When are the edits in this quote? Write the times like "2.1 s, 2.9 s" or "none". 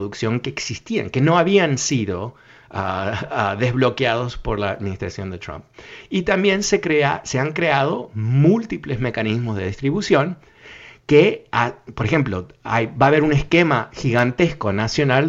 none